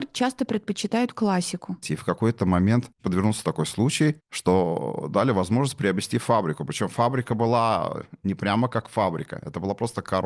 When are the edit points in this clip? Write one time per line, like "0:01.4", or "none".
0:01.8